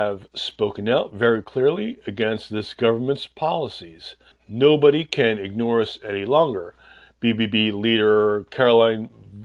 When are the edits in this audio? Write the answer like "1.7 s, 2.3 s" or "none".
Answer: 4.3 s